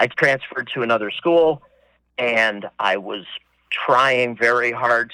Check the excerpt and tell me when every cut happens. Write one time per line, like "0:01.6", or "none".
none

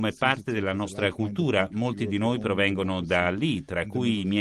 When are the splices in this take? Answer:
none

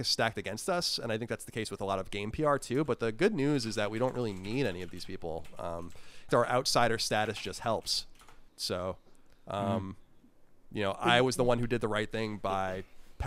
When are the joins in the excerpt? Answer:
0:06.3
0:08.5

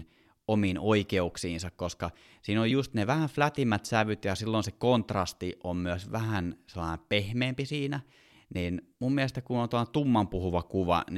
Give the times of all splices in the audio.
none

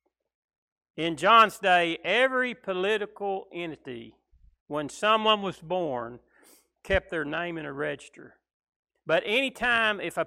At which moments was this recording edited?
0:08.9

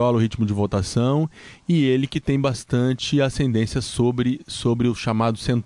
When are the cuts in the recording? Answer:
none

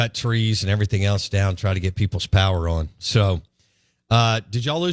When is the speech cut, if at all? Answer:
none

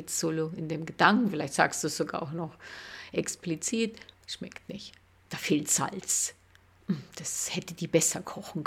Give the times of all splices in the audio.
0:04.1

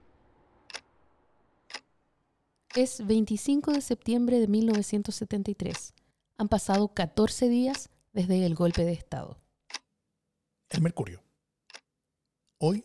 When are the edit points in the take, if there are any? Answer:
none

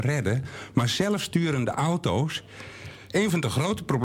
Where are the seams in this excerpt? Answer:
0:03.1

